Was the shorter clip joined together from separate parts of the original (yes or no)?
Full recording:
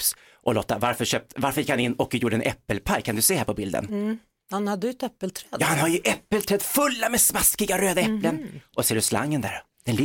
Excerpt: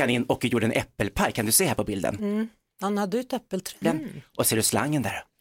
yes